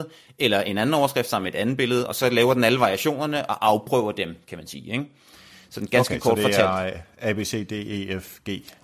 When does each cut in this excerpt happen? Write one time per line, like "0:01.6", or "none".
none